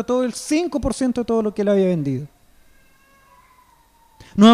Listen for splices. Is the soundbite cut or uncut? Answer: uncut